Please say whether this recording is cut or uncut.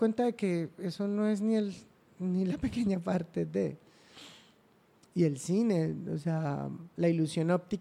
uncut